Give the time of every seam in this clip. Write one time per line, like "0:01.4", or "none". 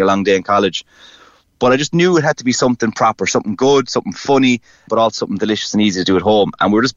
0:04.9